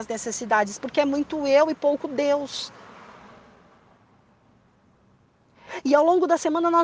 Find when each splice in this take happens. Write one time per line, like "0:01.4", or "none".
none